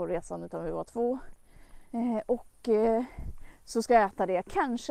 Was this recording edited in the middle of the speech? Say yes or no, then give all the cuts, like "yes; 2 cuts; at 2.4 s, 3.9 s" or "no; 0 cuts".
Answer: yes; 1 cut; at 1.9 s